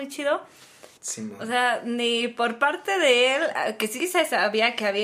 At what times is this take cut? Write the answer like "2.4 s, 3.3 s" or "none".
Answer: 0.9 s